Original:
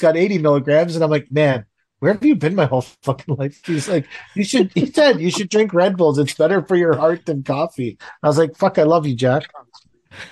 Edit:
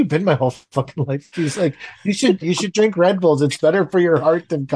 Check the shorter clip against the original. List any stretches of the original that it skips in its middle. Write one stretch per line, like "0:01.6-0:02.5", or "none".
0:04.7-0:05.2